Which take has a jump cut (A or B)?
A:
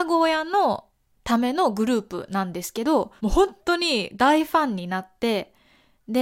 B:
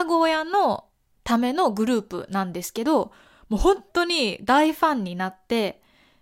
A